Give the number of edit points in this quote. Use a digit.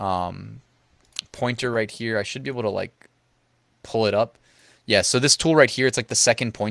0